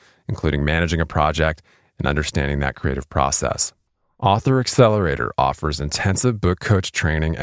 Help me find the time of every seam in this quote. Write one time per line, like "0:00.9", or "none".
none